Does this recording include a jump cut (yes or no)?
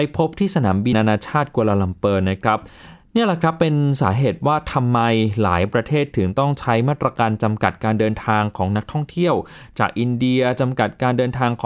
yes